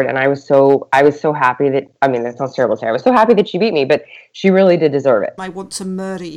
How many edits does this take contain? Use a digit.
1